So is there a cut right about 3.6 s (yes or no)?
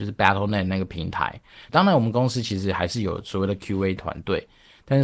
no